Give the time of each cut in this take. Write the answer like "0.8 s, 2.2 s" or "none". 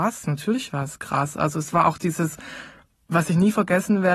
none